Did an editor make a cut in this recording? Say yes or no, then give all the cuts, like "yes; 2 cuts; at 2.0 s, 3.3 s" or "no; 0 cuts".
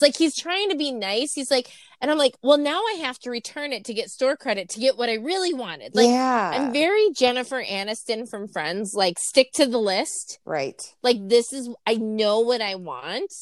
no; 0 cuts